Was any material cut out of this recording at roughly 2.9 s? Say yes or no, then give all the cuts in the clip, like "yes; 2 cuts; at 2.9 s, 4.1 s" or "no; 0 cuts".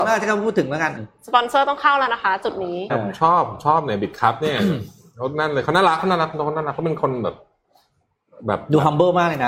yes; 2 cuts; at 1.0 s, 2.9 s